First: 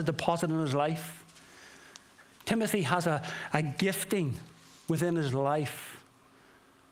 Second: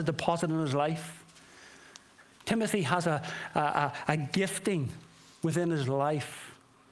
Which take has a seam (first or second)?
first